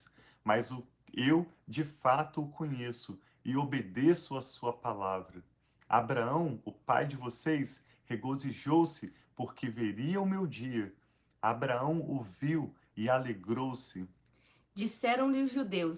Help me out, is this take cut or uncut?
uncut